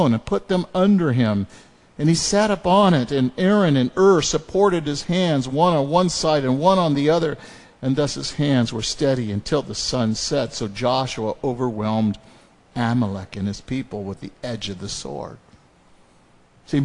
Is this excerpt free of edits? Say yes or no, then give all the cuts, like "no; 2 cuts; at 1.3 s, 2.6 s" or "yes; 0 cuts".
yes; 0 cuts